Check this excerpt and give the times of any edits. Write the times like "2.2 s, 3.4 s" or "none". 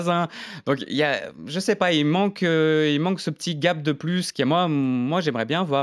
4.3 s

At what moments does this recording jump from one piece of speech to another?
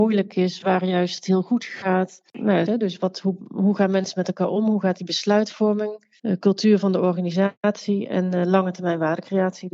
2.7 s, 6.2 s

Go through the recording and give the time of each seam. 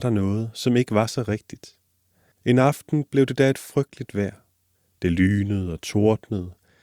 2.3 s

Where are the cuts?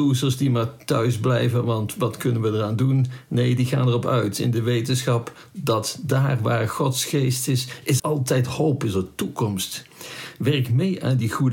8.0 s

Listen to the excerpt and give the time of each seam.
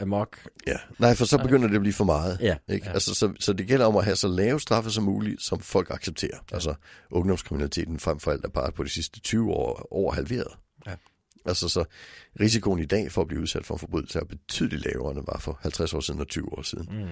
0.9 s, 6.5 s

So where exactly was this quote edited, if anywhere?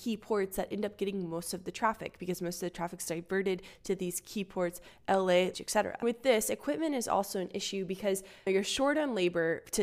5.5 s

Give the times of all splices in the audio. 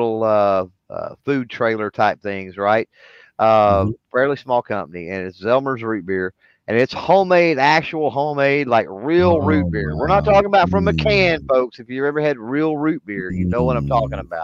none

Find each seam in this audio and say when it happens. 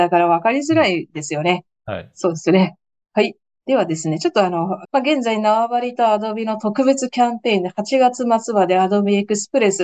4.8 s

